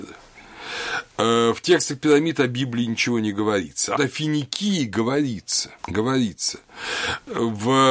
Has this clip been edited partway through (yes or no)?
yes